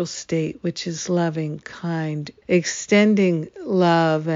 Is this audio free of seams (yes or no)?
no